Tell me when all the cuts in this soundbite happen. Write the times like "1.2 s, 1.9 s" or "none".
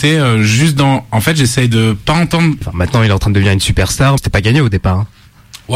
2.6 s, 4.2 s